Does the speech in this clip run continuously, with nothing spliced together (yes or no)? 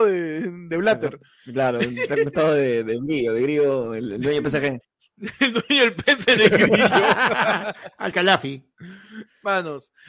yes